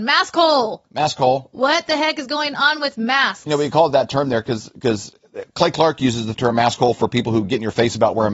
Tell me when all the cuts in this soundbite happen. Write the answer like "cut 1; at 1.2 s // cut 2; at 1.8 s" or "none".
none